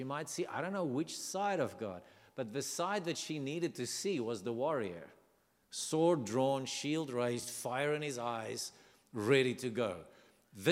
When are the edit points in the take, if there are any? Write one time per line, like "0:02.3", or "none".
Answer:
none